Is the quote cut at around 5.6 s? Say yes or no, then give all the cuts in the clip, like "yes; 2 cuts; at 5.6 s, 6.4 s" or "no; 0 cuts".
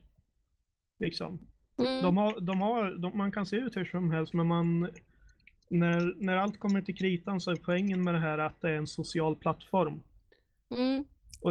no; 1 cut; at 4.3 s